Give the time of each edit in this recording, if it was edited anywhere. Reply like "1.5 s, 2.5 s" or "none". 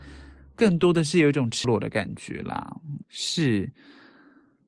1.6 s, 3.0 s